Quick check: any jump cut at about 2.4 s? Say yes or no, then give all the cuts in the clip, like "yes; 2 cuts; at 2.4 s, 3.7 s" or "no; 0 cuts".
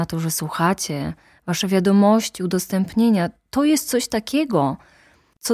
no; 0 cuts